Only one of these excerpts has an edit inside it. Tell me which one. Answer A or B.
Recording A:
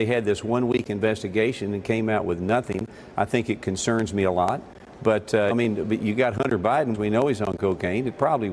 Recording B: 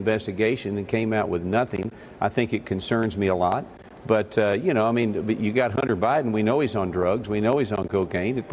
A